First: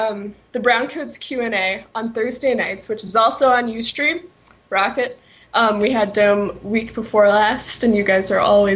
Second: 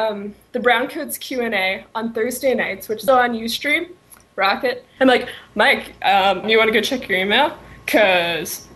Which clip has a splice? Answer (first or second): second